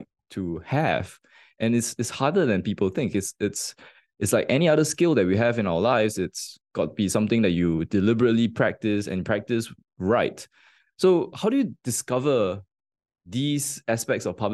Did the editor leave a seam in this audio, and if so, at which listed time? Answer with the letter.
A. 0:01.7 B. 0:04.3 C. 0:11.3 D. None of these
C